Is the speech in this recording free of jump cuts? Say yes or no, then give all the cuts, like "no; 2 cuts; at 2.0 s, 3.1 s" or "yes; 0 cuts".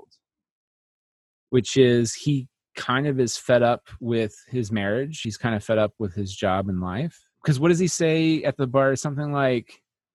yes; 0 cuts